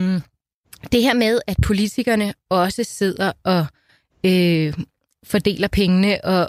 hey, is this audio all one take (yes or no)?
yes